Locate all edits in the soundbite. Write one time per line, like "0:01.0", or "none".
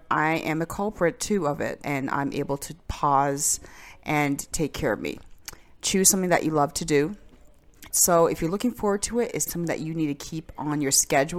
0:01.8
0:07.9
0:09.5